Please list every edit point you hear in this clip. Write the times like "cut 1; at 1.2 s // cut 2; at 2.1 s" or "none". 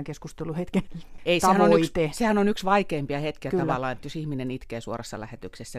none